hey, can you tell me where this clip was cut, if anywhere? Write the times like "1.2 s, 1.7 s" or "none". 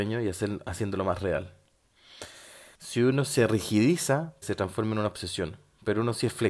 2.7 s, 4.4 s